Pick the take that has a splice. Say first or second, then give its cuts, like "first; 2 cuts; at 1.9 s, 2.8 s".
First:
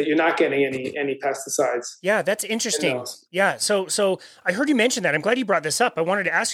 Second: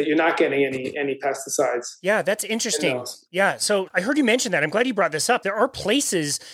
second; 2 cuts; at 3.9 s, 5.4 s